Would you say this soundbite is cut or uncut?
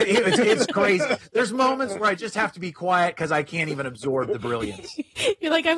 uncut